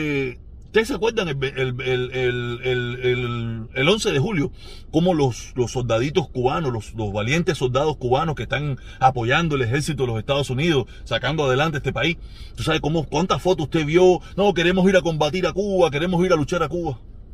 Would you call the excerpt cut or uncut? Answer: uncut